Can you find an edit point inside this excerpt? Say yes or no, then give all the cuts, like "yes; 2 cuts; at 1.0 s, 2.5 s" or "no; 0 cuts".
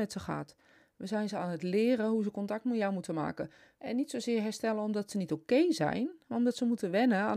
yes; 1 cut; at 3.8 s